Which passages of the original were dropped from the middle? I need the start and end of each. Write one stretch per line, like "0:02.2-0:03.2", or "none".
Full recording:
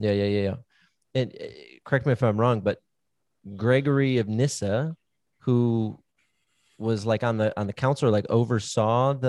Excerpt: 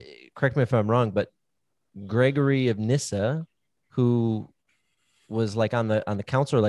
none